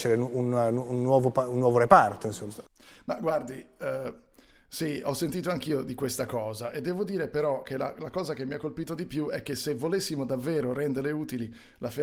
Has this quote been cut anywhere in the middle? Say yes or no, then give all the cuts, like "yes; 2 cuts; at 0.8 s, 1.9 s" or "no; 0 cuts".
no; 0 cuts